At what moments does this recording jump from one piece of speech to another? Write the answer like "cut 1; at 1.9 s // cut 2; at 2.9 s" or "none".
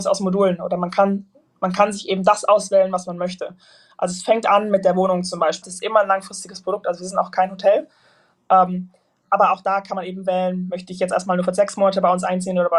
cut 1; at 5.6 s